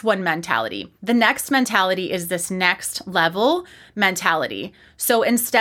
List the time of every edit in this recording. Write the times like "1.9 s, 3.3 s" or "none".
1.0 s